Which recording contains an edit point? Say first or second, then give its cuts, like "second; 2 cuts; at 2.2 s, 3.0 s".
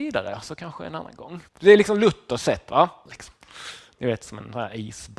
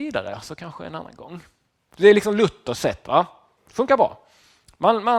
first; 2 cuts; at 1.5 s, 3.1 s